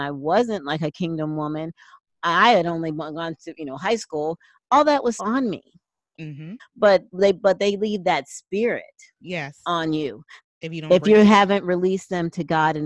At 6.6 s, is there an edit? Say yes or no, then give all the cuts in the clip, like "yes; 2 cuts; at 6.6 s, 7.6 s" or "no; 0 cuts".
yes; 3 cuts; at 5.2 s, 6.6 s, 10.4 s